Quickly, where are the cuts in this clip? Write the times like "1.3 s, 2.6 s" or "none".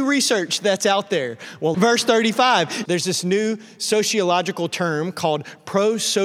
1.7 s, 2.9 s